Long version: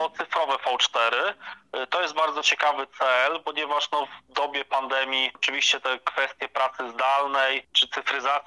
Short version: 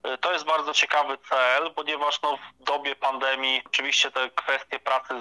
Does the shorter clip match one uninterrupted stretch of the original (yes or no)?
yes